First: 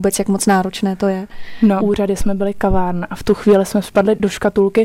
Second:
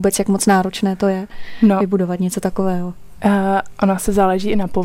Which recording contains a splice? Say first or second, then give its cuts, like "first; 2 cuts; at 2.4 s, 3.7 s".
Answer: first; 1 cut; at 1.8 s